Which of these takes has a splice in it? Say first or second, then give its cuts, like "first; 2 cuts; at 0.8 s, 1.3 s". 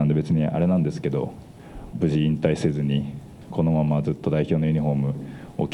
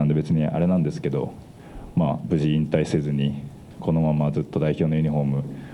first; 1 cut; at 1.9 s